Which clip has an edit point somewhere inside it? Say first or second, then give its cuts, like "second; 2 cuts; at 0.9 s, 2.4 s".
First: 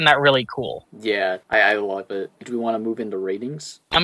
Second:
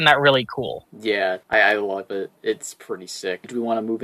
first; 1 cut; at 2.4 s